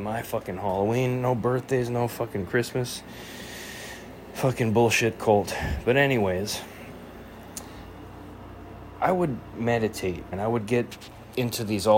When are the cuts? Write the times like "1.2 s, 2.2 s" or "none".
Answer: 10.3 s